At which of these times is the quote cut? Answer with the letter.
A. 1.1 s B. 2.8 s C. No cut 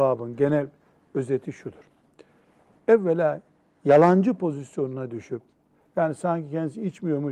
C